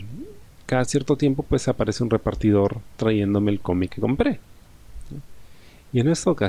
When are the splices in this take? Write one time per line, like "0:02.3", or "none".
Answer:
0:03.9